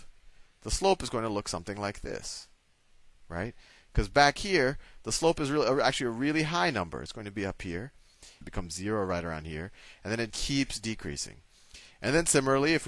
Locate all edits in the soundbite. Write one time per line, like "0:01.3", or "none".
0:08.4
0:10.3